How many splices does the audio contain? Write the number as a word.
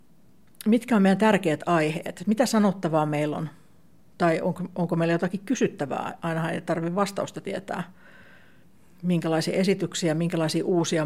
zero